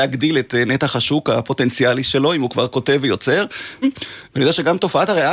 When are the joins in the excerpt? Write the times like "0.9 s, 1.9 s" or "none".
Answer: 3.8 s